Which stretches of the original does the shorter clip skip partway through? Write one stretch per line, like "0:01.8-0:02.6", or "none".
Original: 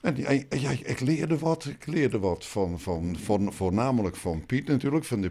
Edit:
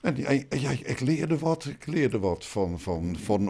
none